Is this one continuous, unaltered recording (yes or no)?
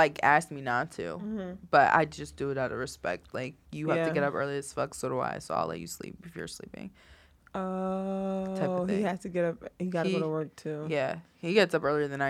yes